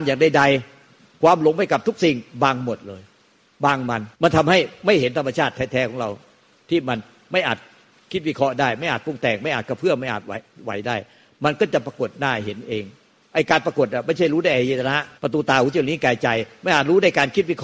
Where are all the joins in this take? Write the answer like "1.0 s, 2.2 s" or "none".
4.1 s, 15.2 s